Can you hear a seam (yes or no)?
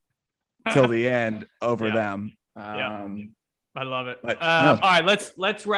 no